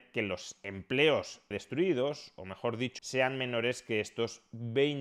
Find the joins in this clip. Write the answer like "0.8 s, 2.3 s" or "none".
1.5 s, 3.0 s

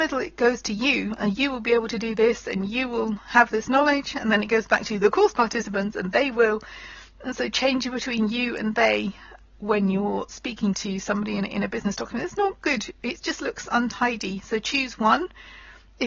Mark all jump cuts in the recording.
none

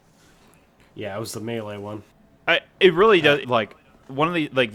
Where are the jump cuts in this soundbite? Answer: 3.4 s

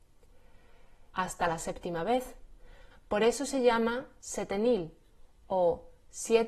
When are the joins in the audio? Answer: 1.1 s, 2.9 s

